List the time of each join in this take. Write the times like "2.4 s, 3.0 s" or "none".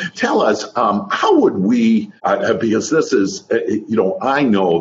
2.2 s

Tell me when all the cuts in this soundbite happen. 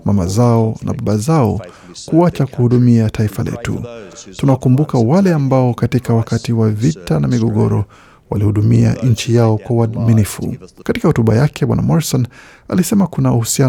10.8 s

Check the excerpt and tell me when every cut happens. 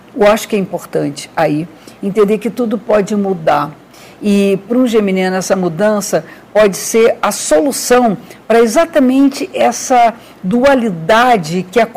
none

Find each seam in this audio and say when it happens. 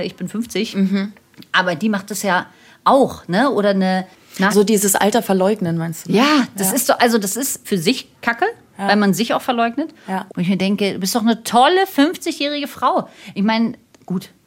4.5 s, 7.6 s, 10.3 s

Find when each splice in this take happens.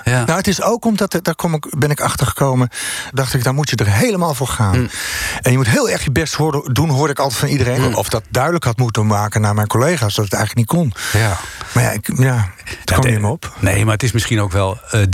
3.1 s, 7.8 s

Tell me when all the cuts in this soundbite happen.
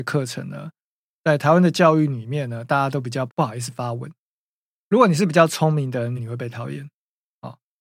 3.3 s, 6.2 s

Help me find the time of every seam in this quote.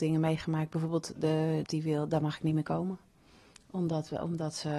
1.6 s

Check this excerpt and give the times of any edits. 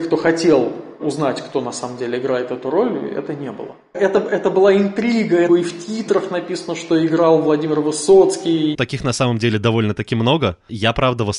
3.9 s, 5.5 s, 8.7 s

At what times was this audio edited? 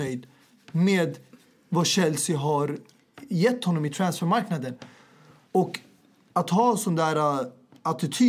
none

